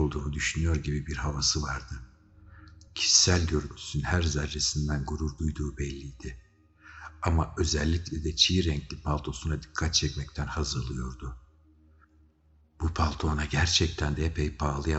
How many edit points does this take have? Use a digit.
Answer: 0